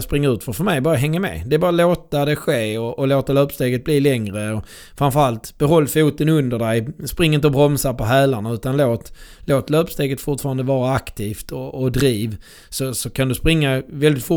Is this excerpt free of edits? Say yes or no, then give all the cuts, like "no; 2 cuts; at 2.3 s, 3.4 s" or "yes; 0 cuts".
yes; 0 cuts